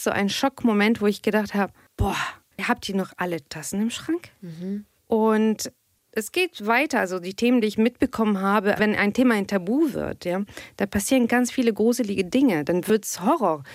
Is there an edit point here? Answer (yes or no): yes